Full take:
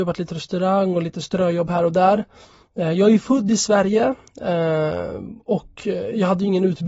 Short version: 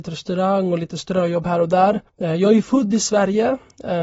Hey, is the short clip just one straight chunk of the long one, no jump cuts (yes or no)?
no